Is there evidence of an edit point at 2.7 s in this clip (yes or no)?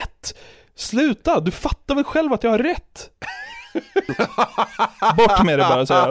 no